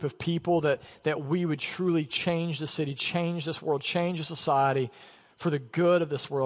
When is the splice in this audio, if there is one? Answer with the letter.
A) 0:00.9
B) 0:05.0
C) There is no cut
C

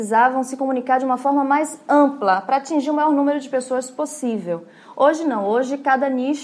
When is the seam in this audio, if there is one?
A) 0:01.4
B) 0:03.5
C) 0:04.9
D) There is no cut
D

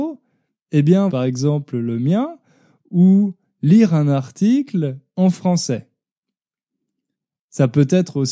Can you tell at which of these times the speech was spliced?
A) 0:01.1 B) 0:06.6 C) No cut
A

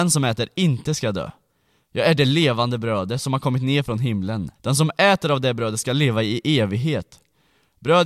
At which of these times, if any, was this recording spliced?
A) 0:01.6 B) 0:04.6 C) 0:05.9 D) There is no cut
B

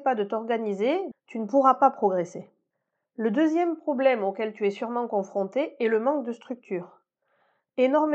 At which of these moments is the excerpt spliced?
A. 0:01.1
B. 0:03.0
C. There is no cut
A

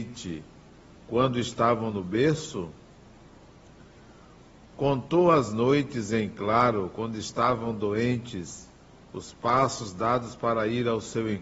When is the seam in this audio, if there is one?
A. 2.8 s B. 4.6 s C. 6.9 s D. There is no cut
D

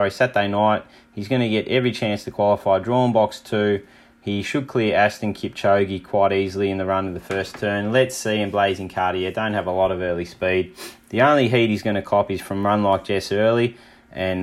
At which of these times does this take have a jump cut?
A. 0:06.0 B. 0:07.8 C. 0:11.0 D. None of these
D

